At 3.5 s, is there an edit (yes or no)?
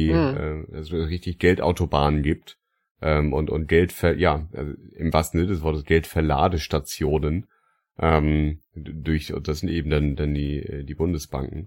no